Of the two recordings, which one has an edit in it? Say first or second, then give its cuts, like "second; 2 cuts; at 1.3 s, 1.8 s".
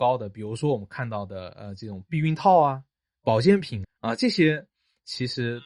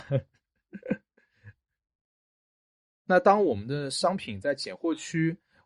first; 1 cut; at 3.8 s